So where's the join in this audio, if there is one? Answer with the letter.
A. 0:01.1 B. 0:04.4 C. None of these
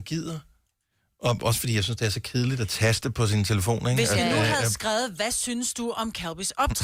C